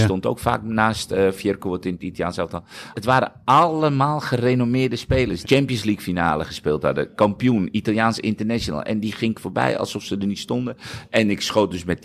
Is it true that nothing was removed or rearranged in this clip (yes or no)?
no